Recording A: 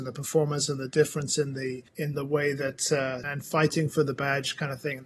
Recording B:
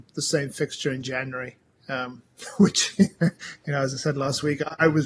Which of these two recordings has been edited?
A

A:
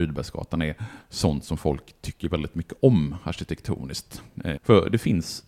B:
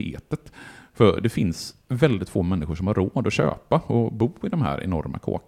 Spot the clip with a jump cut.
A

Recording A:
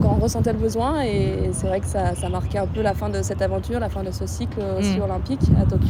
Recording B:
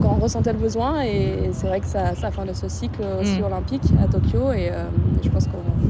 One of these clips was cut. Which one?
B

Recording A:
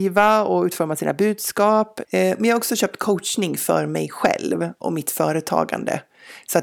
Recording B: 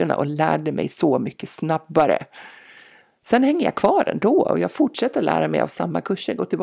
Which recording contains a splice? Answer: A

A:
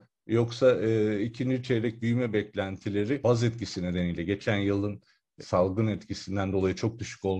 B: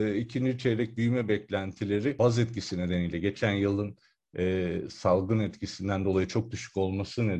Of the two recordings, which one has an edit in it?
A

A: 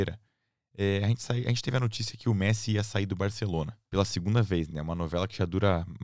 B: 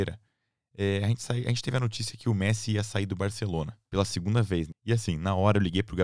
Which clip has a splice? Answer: B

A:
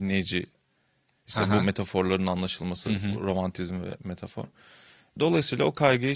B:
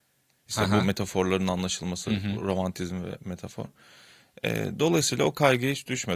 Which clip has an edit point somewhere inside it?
A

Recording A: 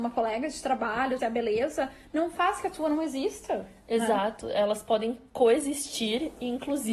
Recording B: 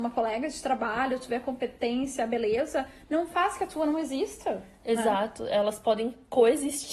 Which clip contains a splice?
A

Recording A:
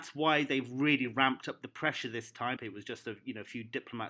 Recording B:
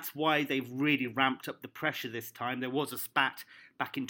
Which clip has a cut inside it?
A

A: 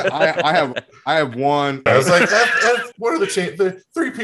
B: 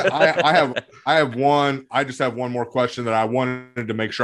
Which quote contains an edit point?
A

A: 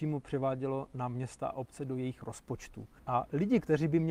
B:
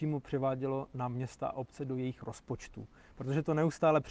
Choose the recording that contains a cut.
A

